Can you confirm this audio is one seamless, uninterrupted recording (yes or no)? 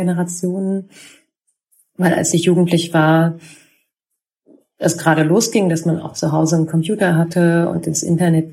yes